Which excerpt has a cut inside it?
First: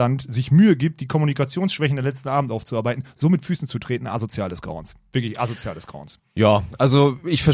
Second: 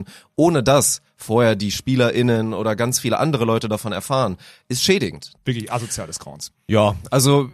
second; 1 cut; at 5.4 s

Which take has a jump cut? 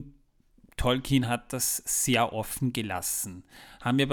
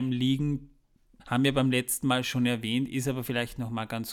second; 1 cut; at 1.2 s

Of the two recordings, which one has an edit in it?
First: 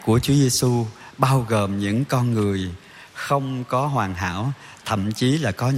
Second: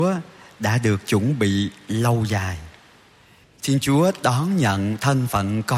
second; 1 cut; at 3.4 s

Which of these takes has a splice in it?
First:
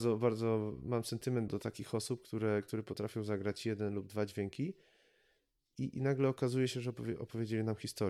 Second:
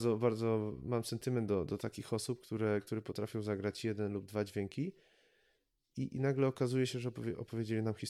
first; 1 cut; at 1.5 s

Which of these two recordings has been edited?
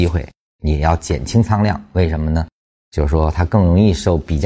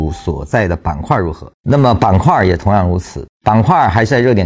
second; 2 cuts; at 1.5 s, 3.3 s

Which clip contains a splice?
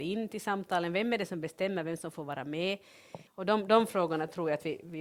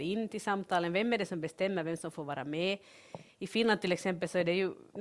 first; 1 cut; at 3.3 s

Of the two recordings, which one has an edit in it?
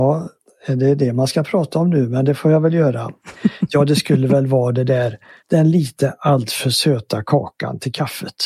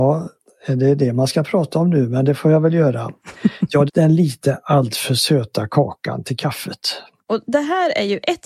second; 2 cuts; at 3.9 s, 7.2 s

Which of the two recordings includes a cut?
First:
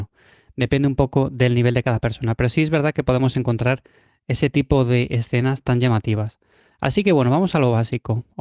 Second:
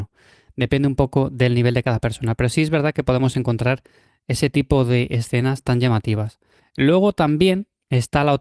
second; 1 cut; at 6.6 s

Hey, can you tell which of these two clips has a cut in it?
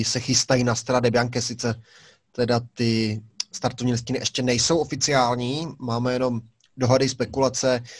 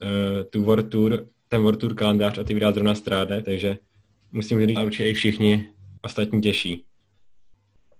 second; 2 cuts; at 3.4 s, 4.8 s

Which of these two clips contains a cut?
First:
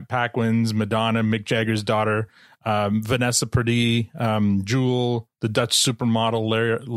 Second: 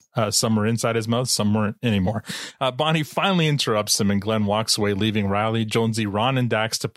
second; 1 cut; at 2.6 s

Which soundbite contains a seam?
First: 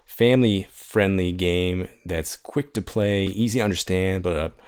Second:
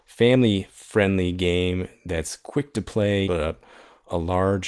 second; 1 cut; at 3.3 s

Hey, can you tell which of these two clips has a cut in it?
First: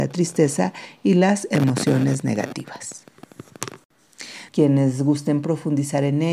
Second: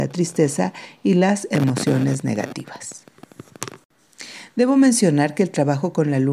first; 1 cut; at 4.5 s

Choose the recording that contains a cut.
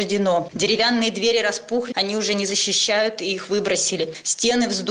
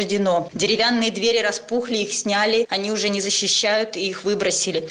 first; 1 cut; at 1.9 s

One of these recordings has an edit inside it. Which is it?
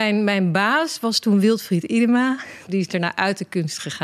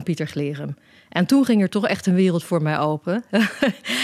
first; 1 cut; at 2.7 s

